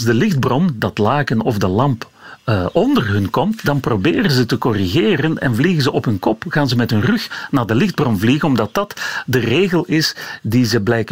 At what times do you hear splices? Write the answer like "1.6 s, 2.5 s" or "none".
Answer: none